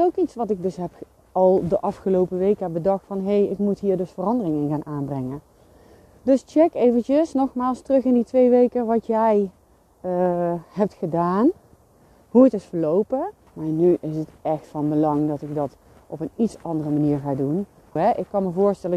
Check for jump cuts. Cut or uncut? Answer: cut